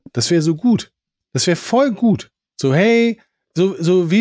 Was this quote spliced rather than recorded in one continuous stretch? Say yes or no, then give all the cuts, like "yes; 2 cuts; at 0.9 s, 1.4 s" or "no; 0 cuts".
no; 0 cuts